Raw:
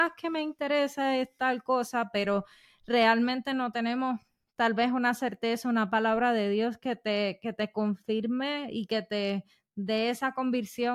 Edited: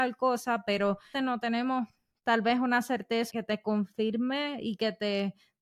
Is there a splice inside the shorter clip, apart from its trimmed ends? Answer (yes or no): yes